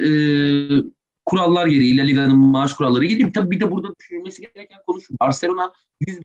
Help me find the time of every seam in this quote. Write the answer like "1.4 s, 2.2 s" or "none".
none